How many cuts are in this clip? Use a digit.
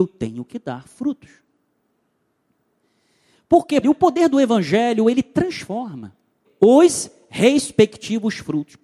2